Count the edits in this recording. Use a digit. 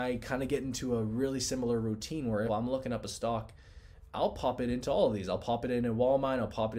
1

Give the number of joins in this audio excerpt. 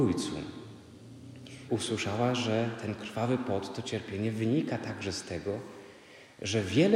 1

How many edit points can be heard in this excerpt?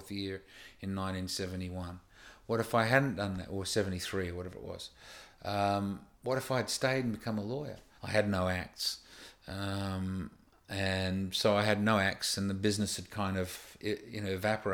2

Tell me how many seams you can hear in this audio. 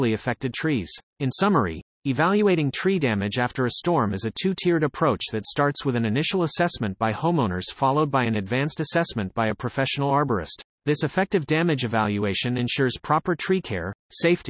2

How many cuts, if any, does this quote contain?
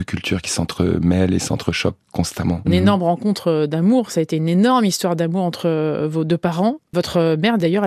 1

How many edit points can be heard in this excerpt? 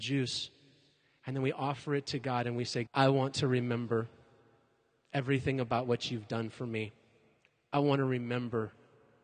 1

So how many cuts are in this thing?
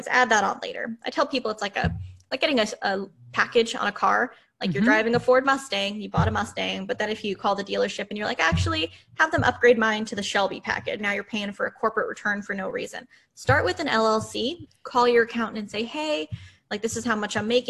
2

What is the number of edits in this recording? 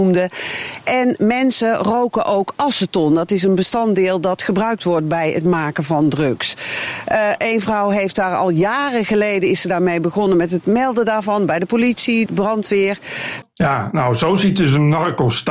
2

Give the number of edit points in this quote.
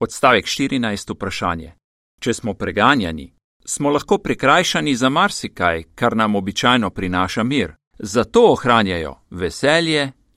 2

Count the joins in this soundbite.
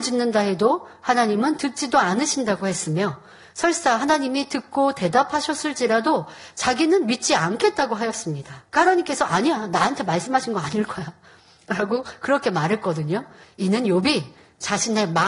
2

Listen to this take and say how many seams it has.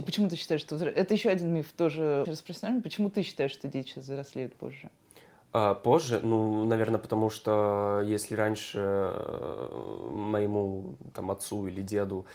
1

